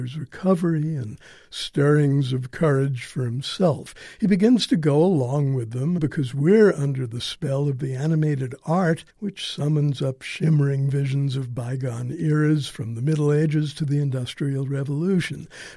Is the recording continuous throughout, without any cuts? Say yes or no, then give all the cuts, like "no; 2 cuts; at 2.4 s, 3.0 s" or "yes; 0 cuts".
no; 2 cuts; at 6.0 s, 9.1 s